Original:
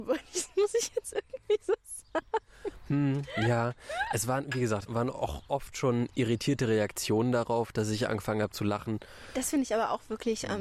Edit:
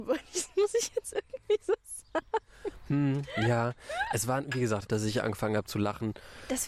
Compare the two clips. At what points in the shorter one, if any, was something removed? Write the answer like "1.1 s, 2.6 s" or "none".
4.9 s